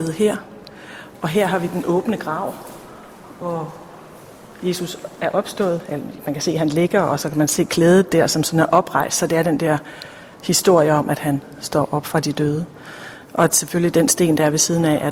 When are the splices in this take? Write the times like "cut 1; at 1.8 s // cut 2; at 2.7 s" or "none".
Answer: none